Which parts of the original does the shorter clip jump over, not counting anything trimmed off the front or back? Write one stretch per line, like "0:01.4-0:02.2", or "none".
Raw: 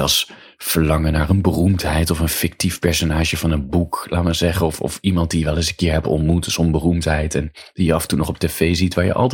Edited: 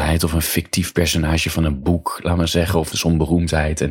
0:04.8-0:06.5